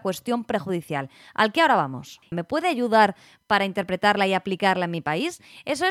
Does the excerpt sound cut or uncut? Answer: cut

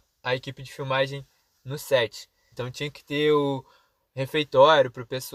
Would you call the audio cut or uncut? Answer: cut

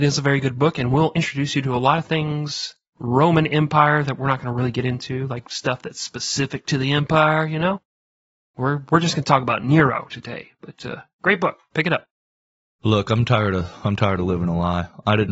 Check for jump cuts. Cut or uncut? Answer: uncut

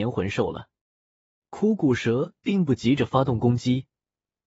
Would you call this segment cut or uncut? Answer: uncut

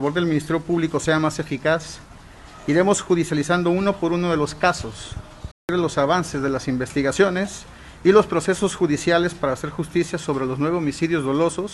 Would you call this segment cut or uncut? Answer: cut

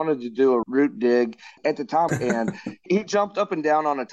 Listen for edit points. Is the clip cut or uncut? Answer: cut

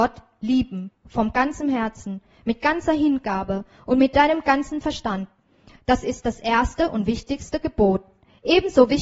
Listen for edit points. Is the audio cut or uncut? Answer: uncut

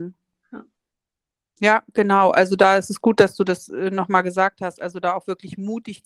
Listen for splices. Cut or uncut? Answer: uncut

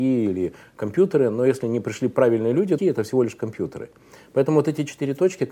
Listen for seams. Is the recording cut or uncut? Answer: cut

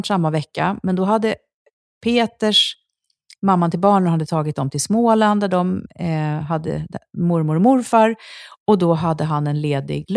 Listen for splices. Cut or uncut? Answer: uncut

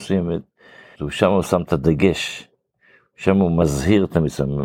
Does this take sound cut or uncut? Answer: cut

